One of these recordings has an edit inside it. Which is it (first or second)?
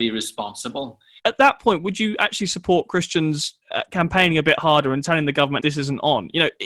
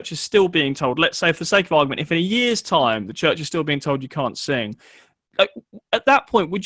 first